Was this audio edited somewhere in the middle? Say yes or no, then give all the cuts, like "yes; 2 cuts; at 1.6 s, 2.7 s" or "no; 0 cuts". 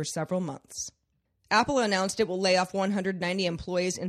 no; 0 cuts